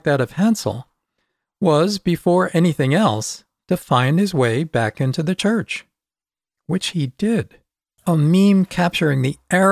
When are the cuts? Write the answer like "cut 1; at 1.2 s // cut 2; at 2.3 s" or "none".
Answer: cut 1; at 8.0 s